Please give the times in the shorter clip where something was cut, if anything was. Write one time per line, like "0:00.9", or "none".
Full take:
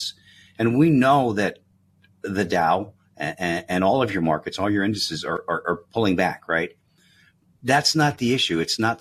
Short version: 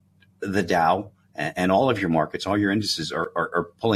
0:01.5